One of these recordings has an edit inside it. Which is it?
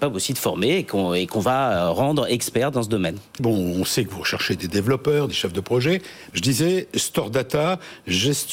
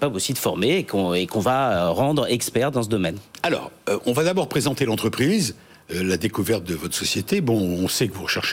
first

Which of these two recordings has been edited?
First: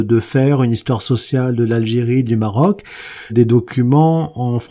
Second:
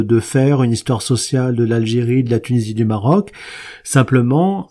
first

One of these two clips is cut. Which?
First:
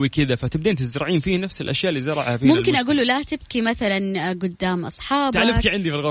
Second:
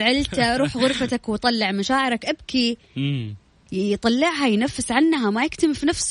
second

